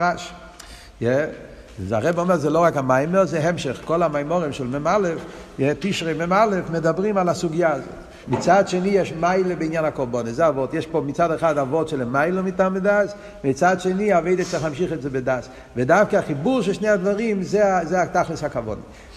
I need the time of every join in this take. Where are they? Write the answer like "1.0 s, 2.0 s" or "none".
8.2 s